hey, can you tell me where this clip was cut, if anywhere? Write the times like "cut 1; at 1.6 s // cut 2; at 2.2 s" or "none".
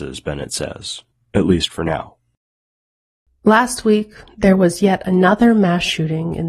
none

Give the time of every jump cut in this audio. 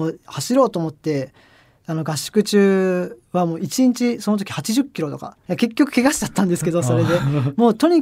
cut 1; at 5.4 s

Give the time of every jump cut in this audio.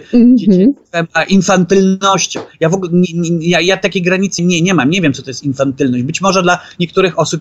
cut 1; at 4.4 s

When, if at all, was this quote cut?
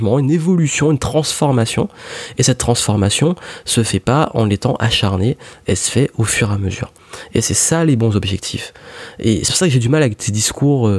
none

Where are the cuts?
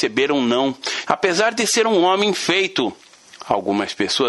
cut 1; at 1.1 s

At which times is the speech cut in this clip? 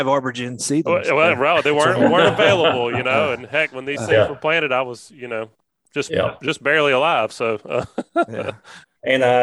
none

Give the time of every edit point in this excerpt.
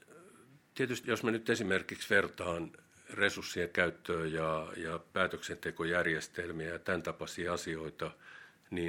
cut 1; at 1.0 s

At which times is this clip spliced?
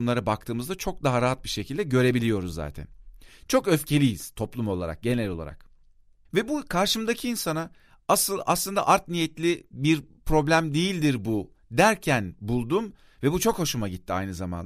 none

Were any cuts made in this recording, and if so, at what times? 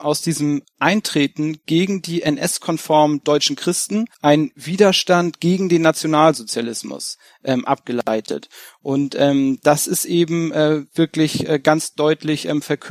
cut 1; at 4.1 s

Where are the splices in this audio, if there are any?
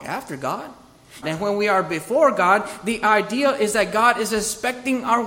cut 1; at 1.2 s

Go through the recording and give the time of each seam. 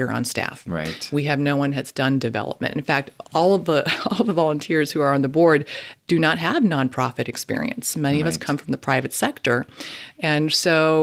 none

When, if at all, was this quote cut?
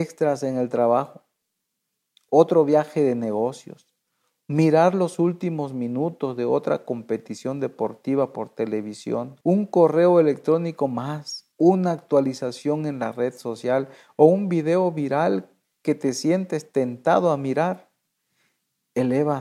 cut 1; at 9.4 s // cut 2; at 11.5 s

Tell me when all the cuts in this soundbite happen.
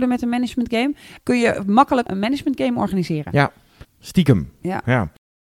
cut 1; at 1.2 s // cut 2; at 3.8 s

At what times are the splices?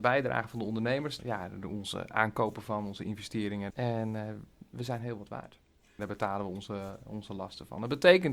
cut 1; at 1.2 s // cut 2; at 3.7 s // cut 3; at 6.0 s

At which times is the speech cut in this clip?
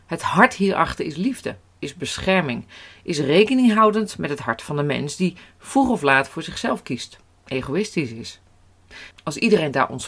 cut 1; at 9.1 s

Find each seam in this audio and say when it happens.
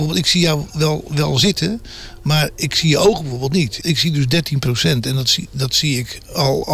cut 1; at 3.8 s

